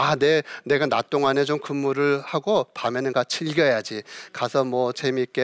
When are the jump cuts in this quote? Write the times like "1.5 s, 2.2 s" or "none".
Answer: none